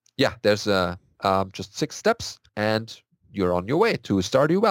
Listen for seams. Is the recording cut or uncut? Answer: cut